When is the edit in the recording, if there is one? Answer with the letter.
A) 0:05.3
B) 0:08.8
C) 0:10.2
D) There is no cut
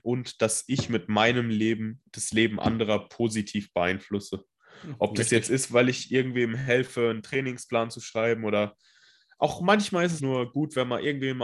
C